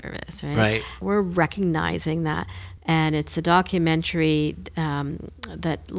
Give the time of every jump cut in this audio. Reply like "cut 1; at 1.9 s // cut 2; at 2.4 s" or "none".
cut 1; at 1.0 s // cut 2; at 2.8 s